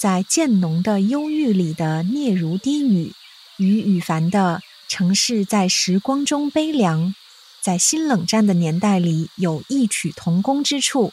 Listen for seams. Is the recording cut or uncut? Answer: uncut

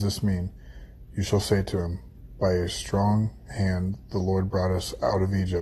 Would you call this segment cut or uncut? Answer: uncut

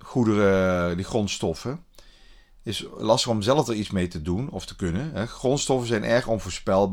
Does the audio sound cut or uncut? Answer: uncut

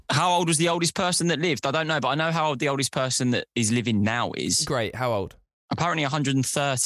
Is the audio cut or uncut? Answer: uncut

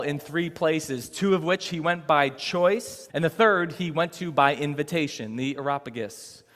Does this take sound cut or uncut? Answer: cut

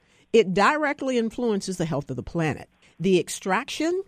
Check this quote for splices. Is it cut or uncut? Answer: cut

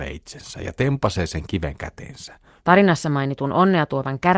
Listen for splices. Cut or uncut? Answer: cut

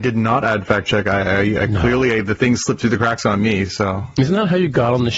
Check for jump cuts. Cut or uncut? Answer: uncut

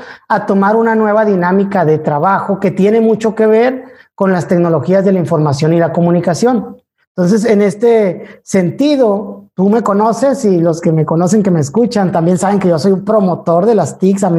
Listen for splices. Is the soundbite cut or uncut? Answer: uncut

